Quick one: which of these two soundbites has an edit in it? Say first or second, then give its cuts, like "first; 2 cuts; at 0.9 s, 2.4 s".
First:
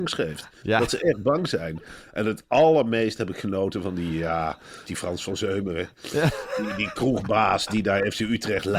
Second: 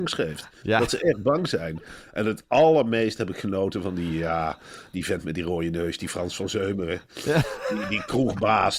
first; 1 cut; at 4.9 s